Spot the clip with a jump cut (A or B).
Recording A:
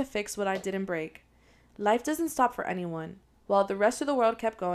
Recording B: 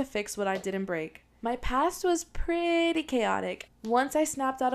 B